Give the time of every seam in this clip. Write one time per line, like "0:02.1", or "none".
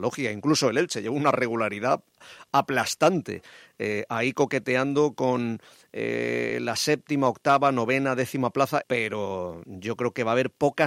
0:08.8